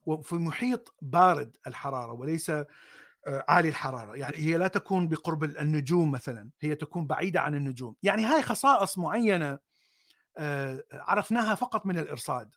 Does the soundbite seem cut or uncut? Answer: cut